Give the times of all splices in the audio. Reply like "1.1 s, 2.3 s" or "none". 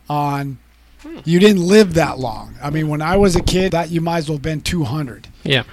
3.7 s